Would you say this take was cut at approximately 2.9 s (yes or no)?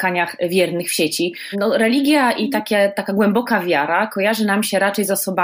no